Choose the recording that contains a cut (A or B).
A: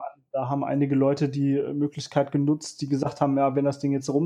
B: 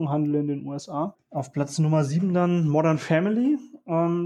B